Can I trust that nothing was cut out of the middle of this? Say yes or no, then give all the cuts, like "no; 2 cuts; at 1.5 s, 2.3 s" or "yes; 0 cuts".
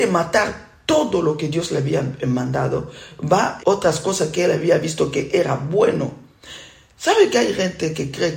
no; 1 cut; at 3.6 s